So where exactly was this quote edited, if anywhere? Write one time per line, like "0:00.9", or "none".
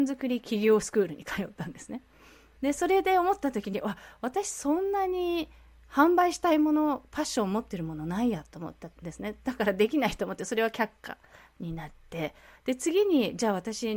0:02.6
0:09.0